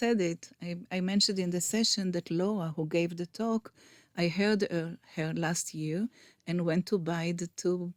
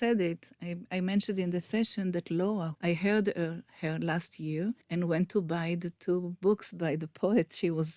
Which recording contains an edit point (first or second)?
second